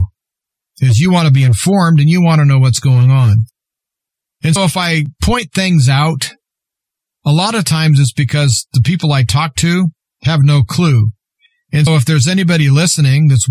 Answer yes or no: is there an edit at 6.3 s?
no